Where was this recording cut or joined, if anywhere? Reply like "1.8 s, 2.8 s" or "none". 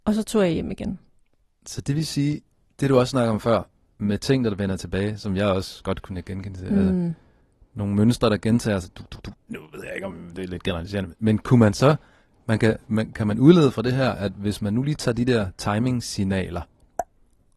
9.3 s

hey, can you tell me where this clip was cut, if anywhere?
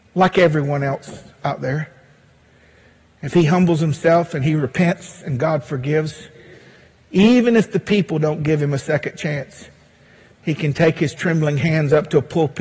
none

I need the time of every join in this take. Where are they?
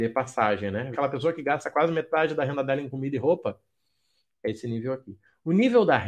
0.9 s

